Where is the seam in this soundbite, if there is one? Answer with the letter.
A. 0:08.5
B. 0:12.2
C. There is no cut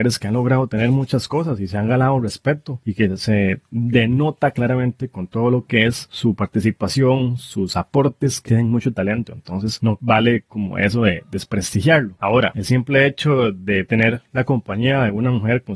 A